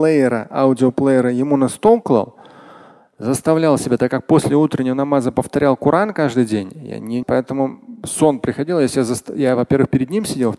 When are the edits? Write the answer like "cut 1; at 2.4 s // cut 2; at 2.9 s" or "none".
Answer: cut 1; at 7.2 s